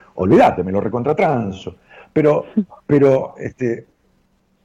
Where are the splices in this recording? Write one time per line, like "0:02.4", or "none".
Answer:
none